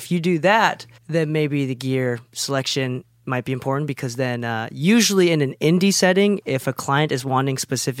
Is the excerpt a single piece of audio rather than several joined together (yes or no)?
no